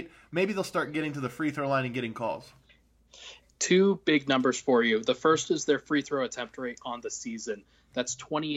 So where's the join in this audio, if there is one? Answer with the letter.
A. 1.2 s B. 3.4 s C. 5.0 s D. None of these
D